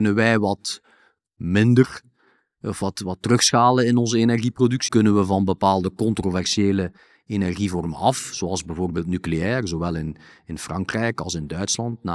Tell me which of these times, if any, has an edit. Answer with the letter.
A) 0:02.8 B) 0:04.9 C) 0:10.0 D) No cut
B